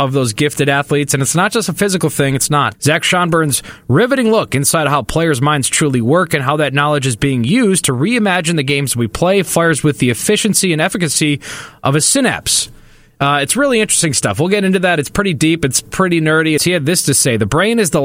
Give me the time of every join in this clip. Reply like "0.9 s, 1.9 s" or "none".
2.7 s, 16.6 s